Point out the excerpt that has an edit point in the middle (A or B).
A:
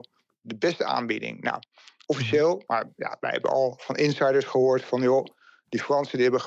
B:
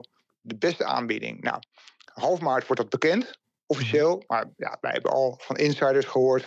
A